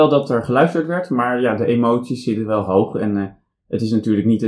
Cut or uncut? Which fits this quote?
uncut